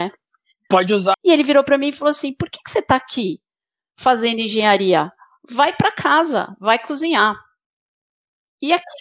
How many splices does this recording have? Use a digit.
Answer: 1